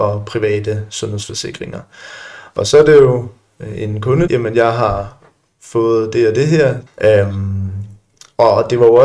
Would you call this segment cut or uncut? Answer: cut